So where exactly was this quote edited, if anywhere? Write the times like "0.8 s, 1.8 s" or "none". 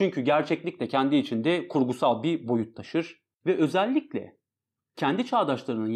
3.3 s

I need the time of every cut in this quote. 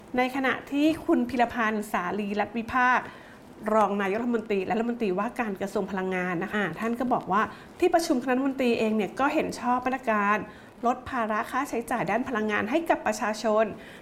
6.5 s

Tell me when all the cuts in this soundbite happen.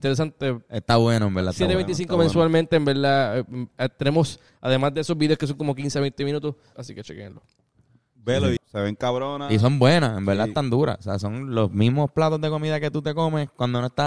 6.7 s, 8.6 s

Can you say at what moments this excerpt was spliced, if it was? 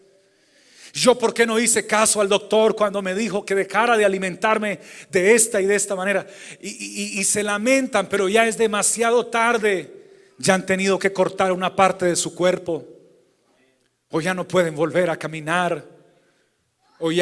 none

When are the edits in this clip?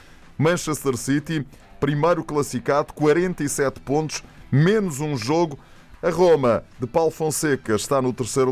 5.9 s

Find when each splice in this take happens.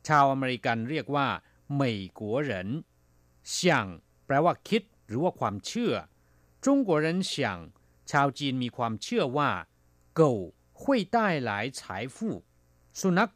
none

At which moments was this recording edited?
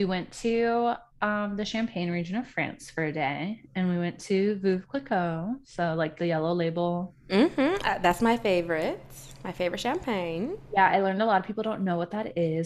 none

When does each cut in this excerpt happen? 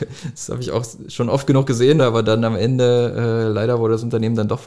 2.0 s

